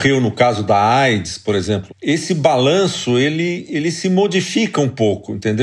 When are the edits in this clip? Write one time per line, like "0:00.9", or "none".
0:01.9